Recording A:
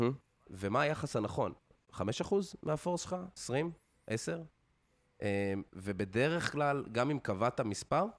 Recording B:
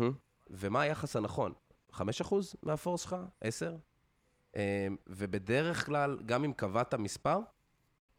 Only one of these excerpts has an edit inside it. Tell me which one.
B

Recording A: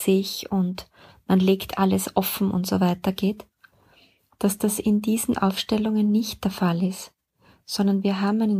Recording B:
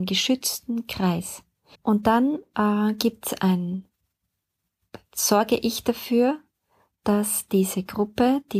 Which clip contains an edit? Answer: B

